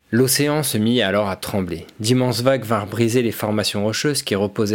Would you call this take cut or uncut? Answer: uncut